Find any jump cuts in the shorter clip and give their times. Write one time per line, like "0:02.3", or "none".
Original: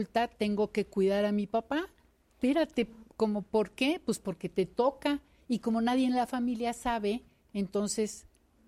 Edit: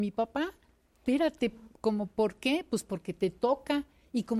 none